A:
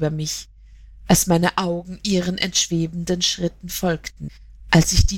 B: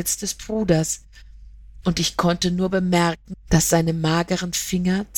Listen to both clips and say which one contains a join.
B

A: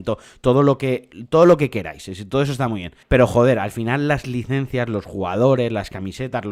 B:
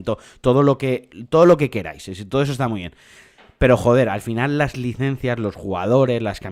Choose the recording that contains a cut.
A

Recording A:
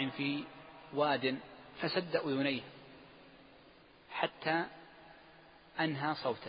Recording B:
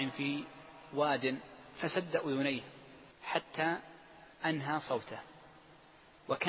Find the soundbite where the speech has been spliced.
B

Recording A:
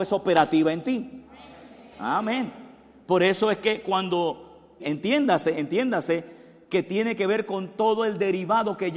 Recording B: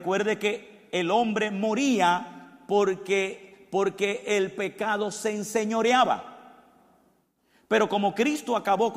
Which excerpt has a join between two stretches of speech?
A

